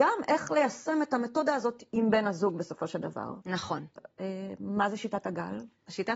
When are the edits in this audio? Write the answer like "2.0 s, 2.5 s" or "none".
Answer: 4.0 s

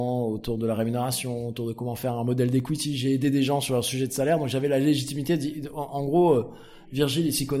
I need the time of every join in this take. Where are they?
none

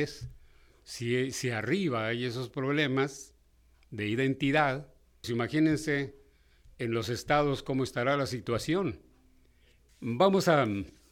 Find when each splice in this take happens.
5.2 s, 9.9 s

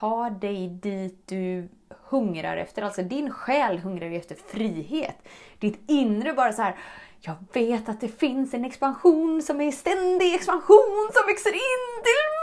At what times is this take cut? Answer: none

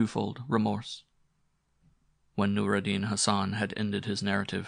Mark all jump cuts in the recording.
none

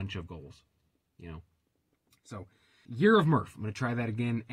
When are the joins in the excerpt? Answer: 2.9 s

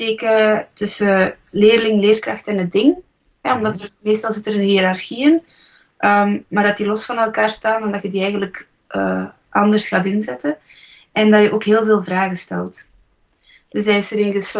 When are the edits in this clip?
none

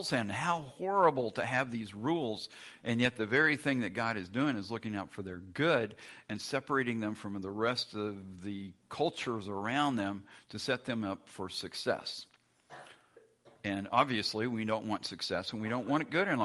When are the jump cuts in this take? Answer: none

